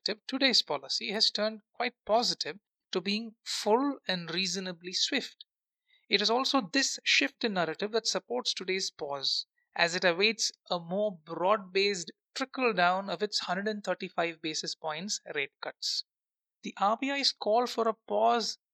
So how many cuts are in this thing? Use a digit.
0